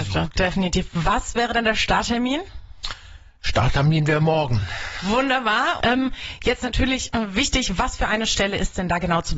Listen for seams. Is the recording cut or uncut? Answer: cut